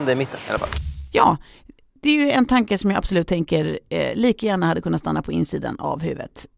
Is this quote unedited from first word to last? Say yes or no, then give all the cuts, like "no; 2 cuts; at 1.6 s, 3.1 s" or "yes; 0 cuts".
yes; 0 cuts